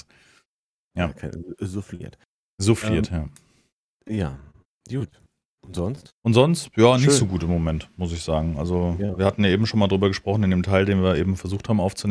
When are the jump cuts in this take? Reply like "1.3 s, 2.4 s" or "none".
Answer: 6.2 s